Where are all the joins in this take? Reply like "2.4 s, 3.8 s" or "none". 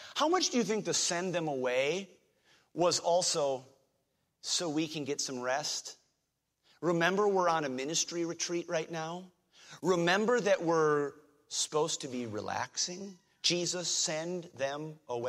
none